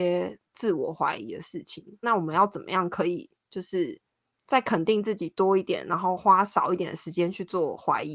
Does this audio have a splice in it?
yes; 1 cut; at 2.0 s

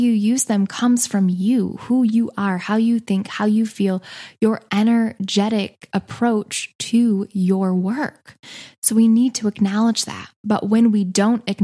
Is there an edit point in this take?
no; 0 cuts

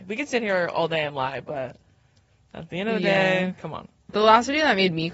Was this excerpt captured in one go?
no; 1 cut; at 4.1 s

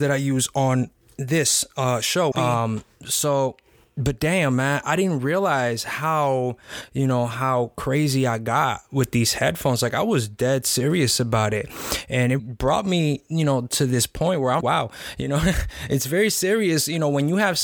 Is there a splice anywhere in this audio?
yes; 3 cuts; at 2.3 s, 12.4 s, 14.6 s

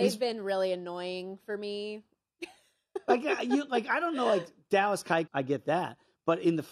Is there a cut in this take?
yes; 1 cut; at 5.3 s

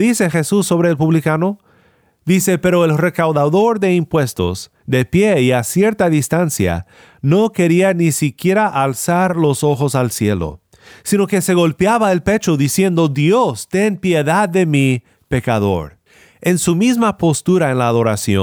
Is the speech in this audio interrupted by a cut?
no; 0 cuts

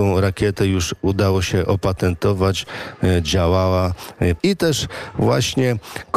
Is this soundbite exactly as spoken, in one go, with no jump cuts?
no; 1 cut; at 4.4 s

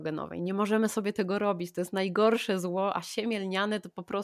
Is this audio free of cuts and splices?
yes; 0 cuts

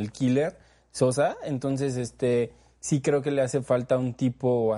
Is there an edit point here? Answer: no; 0 cuts

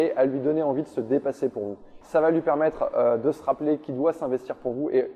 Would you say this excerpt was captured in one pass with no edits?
no; 1 cut; at 2.0 s

